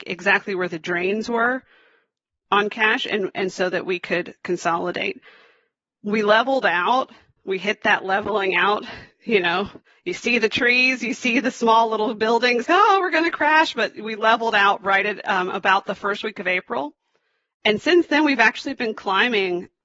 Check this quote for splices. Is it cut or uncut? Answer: cut